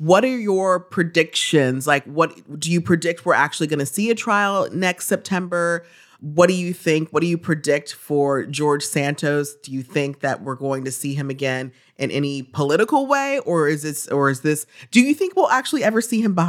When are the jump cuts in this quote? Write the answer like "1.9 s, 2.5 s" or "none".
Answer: none